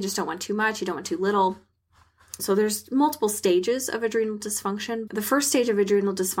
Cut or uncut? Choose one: cut